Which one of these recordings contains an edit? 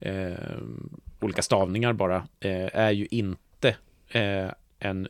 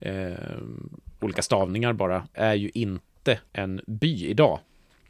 second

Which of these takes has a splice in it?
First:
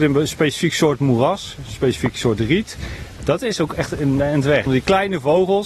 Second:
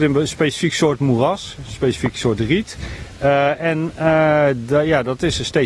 first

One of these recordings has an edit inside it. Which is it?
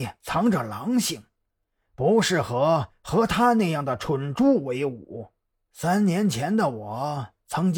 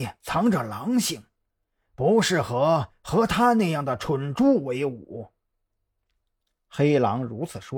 first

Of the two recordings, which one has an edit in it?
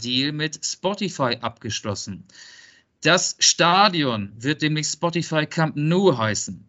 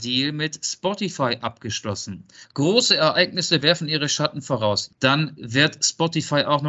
second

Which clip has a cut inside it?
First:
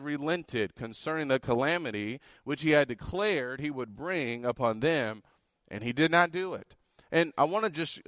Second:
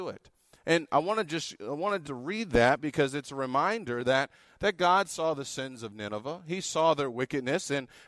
second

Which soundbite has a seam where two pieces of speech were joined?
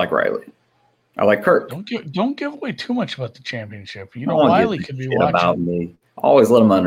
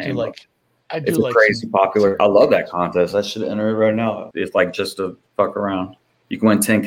second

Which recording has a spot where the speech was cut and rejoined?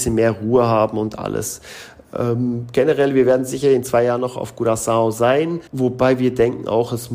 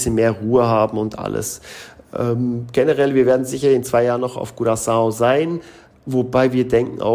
first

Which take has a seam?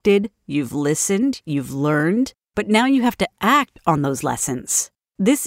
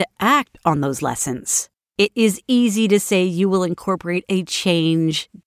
second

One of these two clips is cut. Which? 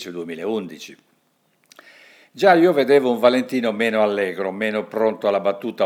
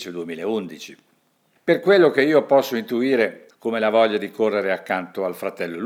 second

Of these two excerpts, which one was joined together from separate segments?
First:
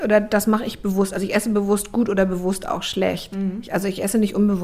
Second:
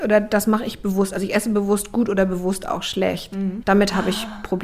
second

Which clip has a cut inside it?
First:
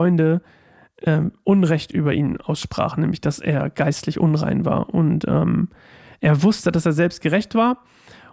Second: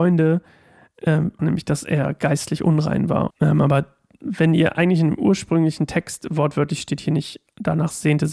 second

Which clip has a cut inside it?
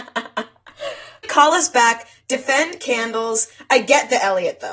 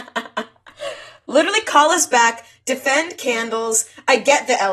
first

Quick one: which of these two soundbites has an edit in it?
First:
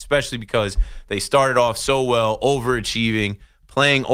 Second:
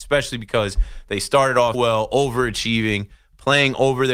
second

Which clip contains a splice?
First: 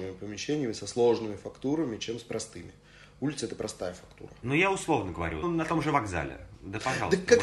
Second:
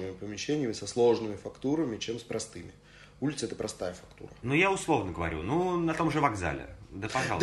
first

